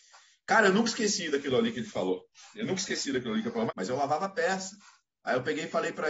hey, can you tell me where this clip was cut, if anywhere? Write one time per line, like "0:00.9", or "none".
0:03.7